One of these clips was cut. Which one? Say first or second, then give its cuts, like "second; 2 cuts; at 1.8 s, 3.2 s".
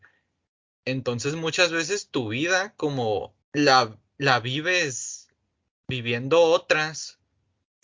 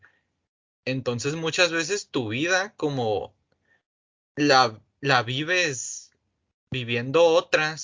first; 1 cut; at 3.4 s